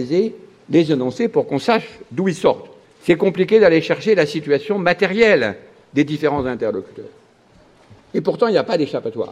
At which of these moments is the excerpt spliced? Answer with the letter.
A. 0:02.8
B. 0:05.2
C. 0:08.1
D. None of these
A